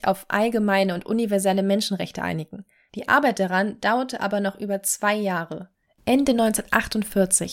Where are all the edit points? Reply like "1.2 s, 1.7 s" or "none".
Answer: none